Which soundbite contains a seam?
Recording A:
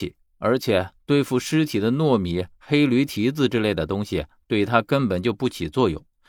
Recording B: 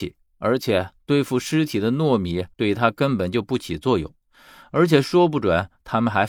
B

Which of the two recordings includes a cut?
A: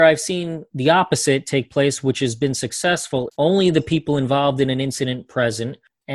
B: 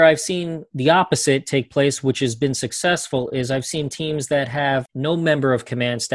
A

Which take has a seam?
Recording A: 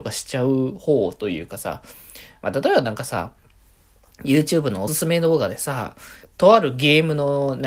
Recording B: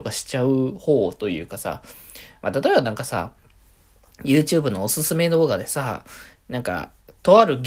A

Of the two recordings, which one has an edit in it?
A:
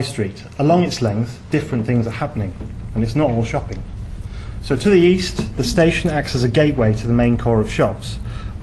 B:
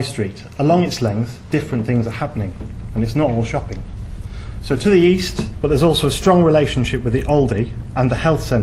B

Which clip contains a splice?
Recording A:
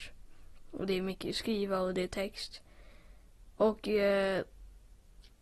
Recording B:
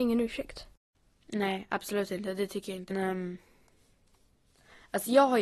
B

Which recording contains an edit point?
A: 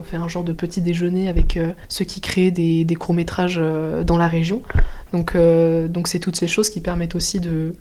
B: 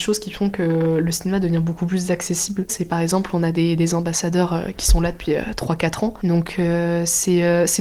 B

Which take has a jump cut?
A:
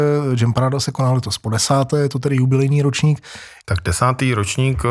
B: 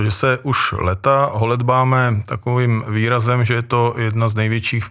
A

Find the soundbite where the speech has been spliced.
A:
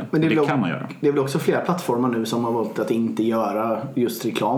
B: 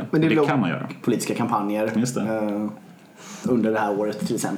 B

